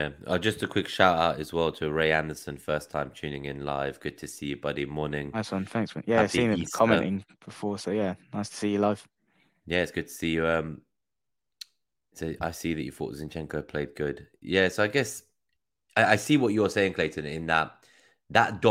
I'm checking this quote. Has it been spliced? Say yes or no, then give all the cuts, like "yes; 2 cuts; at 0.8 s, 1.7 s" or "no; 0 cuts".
no; 0 cuts